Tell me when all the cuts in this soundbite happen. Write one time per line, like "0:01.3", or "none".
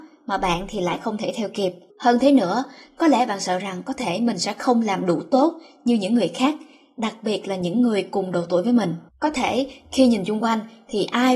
0:01.9
0:09.1

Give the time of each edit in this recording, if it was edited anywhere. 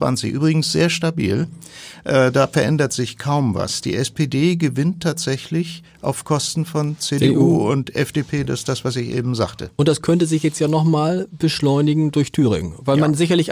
none

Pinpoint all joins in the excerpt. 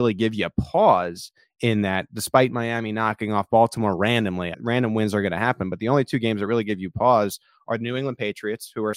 0:04.5

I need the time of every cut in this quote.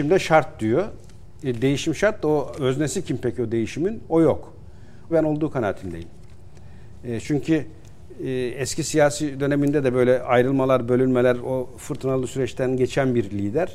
0:05.1

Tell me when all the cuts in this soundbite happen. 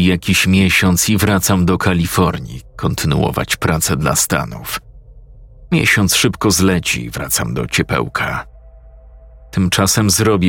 0:05.7

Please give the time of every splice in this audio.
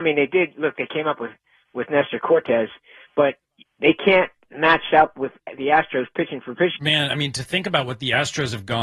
0:06.8

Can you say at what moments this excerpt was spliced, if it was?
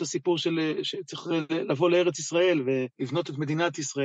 0:02.9

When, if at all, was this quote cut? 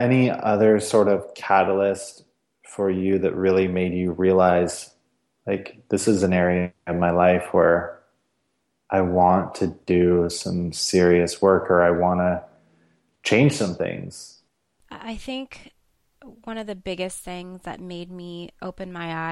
none

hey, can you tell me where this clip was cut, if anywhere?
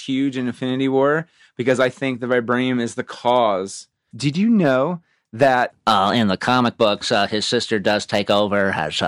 0:04.1
0:05.7

